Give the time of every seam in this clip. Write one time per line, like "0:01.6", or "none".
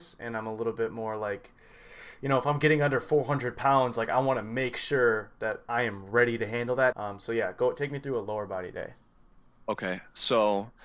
0:06.9